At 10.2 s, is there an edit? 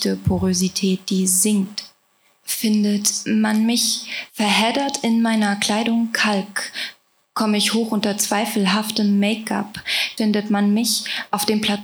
yes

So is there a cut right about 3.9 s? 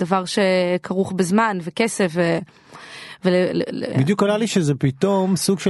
yes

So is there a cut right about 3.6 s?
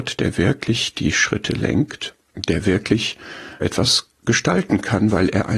yes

